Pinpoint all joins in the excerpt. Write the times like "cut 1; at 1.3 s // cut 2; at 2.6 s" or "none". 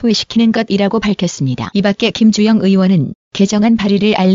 none